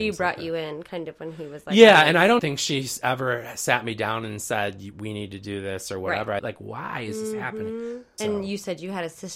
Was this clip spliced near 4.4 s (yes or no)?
no